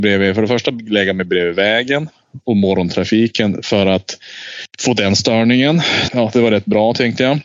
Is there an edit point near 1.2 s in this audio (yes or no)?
no